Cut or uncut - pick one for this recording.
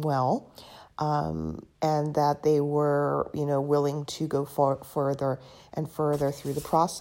cut